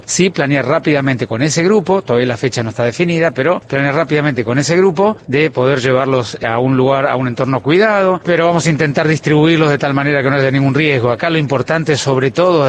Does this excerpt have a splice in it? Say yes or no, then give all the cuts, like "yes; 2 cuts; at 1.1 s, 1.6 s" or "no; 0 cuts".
yes; 1 cut; at 8.2 s